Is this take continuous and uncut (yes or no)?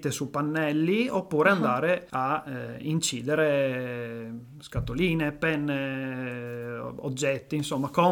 yes